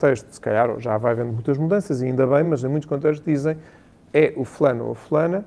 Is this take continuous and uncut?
yes; 0 cuts

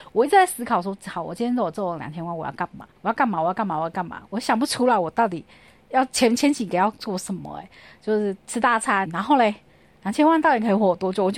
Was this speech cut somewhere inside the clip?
yes; 2 cuts; at 3.0 s, 9.1 s

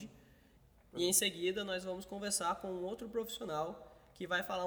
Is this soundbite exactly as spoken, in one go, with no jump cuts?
yes; 0 cuts

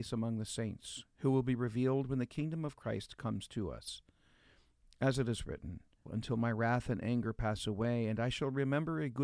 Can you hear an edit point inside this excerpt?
yes; 1 cut; at 6.1 s

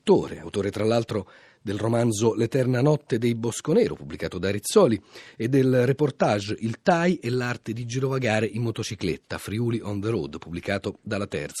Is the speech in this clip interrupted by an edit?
no; 0 cuts

